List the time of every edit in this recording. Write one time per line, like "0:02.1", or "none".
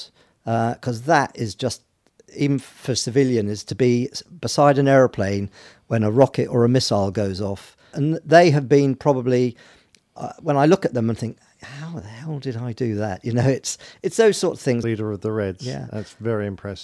0:07.9
0:14.8